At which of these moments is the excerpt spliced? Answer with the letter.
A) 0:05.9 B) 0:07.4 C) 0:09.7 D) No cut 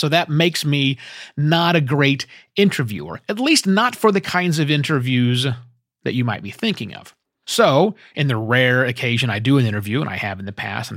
B